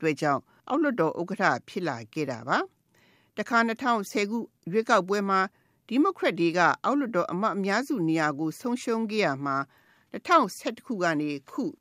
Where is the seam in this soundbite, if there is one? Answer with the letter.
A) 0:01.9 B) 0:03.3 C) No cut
C